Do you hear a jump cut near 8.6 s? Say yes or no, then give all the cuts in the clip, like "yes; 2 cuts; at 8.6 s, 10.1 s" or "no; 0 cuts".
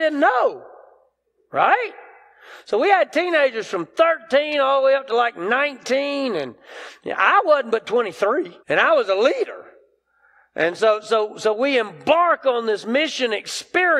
yes; 1 cut; at 8.6 s